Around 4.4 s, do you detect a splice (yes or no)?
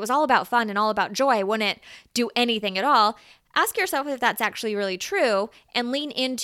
no